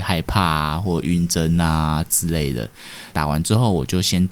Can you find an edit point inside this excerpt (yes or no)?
yes